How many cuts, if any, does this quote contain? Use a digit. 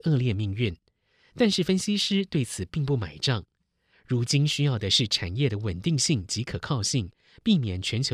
1